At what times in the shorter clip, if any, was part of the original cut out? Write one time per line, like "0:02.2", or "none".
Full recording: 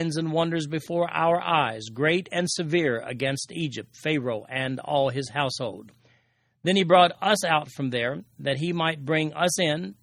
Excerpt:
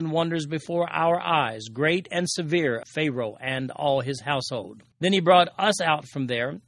0:02.8
0:04.9